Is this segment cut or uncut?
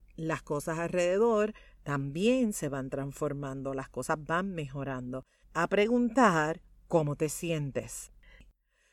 cut